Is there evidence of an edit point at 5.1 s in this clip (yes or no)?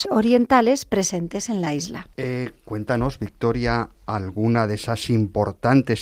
no